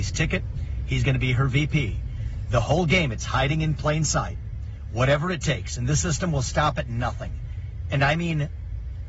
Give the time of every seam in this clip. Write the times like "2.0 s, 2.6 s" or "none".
none